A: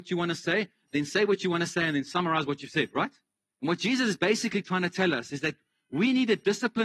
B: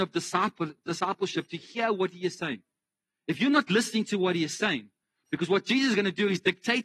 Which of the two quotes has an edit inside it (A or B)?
A